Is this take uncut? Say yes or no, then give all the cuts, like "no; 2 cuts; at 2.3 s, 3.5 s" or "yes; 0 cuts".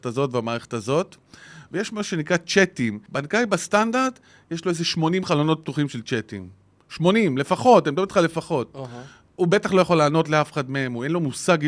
yes; 0 cuts